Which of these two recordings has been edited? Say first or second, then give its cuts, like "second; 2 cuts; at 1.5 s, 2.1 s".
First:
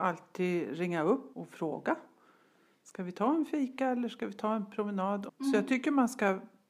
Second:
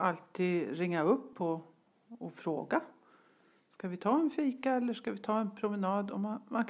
first; 2 cuts; at 1.3 s, 5.3 s